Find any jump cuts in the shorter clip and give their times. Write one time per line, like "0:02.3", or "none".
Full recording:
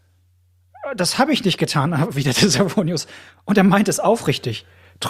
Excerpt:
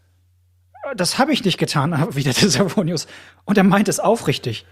none